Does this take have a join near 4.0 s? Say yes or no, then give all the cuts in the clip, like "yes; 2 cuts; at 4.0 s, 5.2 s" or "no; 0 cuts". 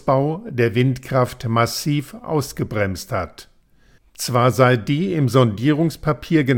yes; 1 cut; at 4.0 s